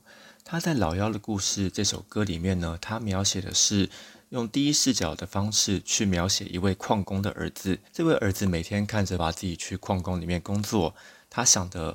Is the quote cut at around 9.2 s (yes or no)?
yes